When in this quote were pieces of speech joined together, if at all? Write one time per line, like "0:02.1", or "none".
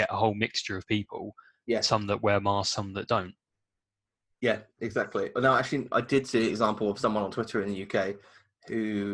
none